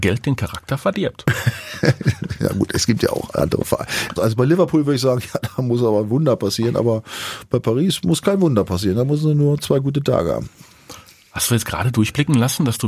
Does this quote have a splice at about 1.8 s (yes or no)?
no